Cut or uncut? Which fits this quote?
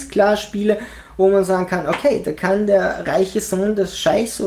uncut